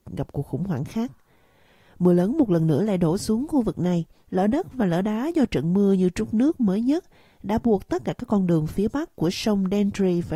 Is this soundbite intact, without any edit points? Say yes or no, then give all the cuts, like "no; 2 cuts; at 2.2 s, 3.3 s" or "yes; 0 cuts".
no; 1 cut; at 4.2 s